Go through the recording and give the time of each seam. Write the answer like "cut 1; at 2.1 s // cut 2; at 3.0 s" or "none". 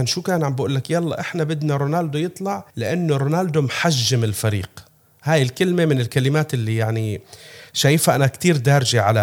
cut 1; at 2.7 s